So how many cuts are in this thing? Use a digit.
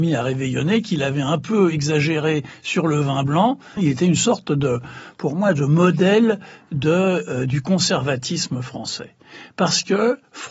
1